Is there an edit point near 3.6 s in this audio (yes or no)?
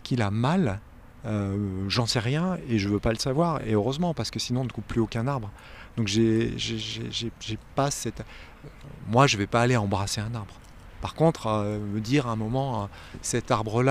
no